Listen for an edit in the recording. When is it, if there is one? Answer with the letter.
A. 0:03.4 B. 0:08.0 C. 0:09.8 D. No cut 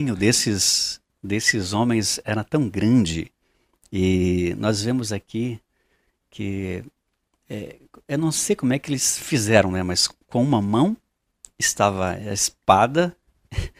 D